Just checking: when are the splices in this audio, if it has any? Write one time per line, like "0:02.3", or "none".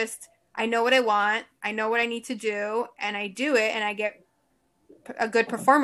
none